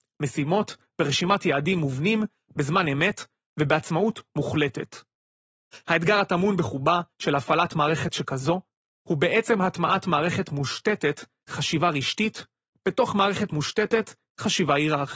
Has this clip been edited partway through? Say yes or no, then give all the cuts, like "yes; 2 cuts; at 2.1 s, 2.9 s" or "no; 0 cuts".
no; 0 cuts